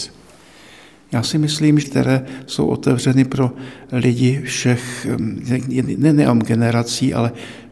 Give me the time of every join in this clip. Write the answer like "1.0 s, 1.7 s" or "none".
1.8 s